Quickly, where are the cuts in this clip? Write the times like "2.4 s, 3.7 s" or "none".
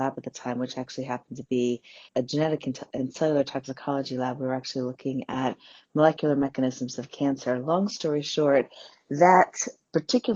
2.1 s